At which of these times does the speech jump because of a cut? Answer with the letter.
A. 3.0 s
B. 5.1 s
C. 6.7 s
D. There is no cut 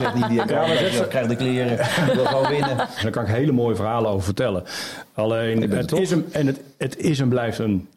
A